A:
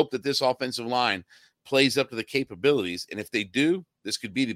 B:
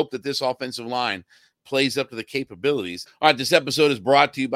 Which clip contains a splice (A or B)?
B